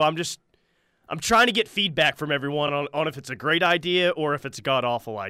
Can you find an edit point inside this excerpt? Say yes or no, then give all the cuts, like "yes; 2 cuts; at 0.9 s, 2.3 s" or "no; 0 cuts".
no; 0 cuts